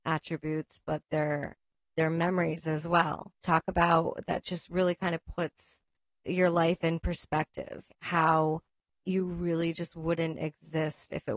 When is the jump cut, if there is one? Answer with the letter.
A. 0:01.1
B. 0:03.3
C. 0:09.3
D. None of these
B